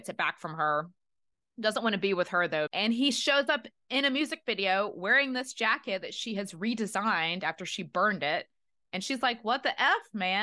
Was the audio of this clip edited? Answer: no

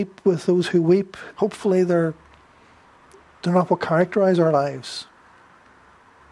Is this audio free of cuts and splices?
no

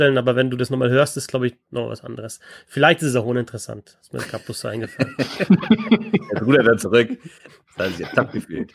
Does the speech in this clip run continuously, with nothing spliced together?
yes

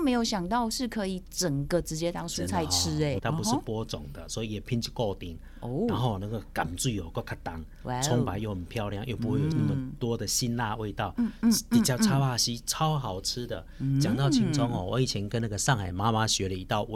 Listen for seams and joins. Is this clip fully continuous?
no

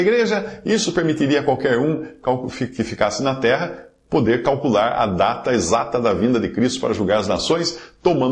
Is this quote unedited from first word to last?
yes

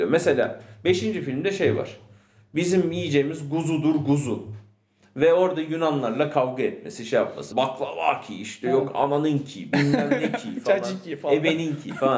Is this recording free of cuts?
no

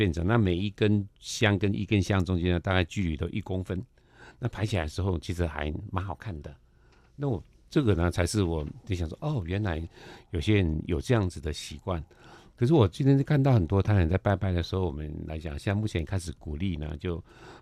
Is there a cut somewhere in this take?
no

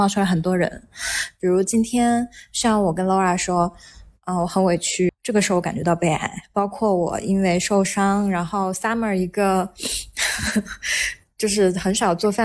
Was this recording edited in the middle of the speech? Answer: yes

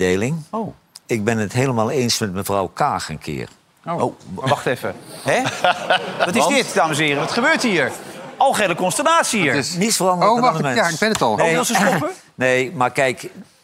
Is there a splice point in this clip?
no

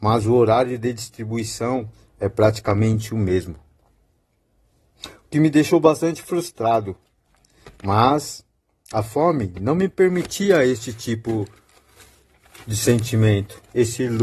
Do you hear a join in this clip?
no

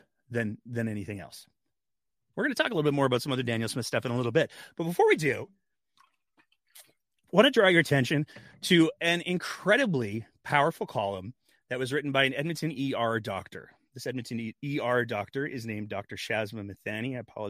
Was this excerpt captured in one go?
yes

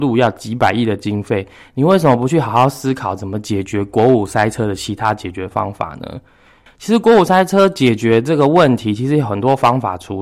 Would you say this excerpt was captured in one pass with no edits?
yes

